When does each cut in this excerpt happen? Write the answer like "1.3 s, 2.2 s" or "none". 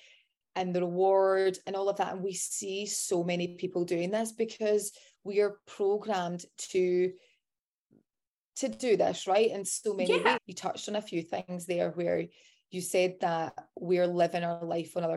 10.4 s